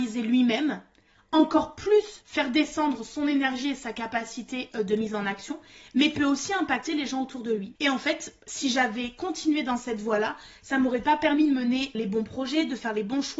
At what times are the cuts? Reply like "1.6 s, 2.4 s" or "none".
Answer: 7.8 s, 11.9 s